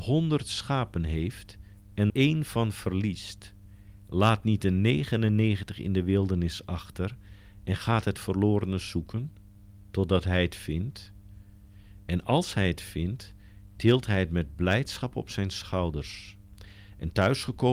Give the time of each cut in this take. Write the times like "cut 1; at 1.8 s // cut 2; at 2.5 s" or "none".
cut 1; at 2.1 s